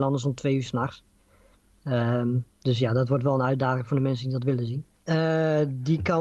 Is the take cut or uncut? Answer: cut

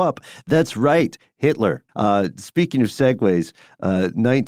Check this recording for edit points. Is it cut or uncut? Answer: cut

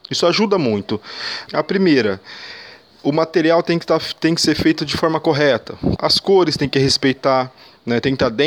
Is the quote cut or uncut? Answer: cut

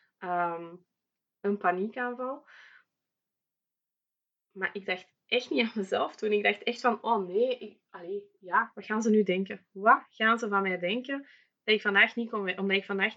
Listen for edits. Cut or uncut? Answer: uncut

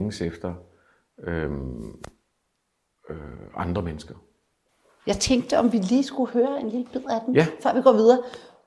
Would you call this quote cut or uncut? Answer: uncut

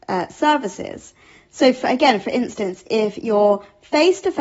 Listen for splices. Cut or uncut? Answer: uncut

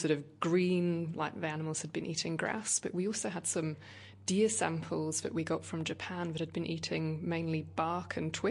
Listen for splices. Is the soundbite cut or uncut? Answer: uncut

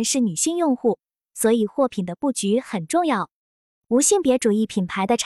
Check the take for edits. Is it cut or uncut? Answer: uncut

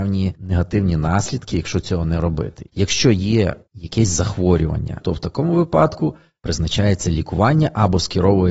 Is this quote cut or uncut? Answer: cut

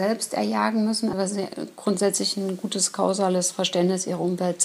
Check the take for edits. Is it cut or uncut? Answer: cut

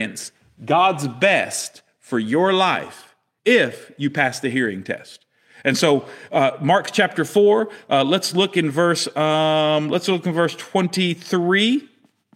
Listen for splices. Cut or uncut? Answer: cut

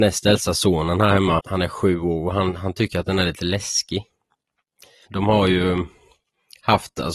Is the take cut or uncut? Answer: cut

